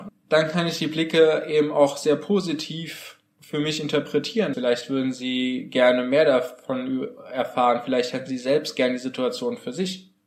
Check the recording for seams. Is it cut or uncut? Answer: cut